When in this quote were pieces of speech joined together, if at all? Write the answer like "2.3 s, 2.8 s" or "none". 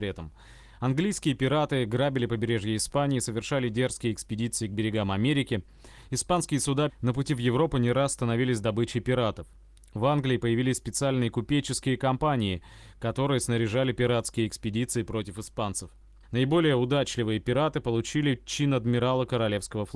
6.9 s, 16.2 s